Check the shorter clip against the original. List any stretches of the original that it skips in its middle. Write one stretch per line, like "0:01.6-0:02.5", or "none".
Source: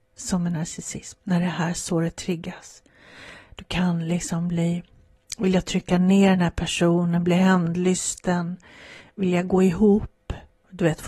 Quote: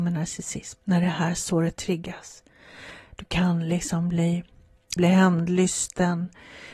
0:05.4-0:07.2